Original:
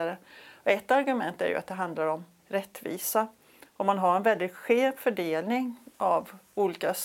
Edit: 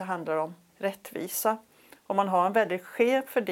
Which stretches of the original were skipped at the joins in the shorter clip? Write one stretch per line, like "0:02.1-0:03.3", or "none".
none